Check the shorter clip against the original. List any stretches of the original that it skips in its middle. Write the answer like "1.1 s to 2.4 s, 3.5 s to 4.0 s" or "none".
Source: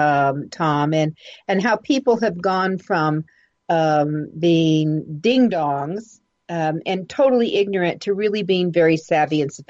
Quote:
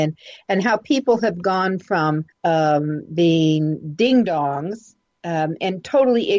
3.3 s to 3.6 s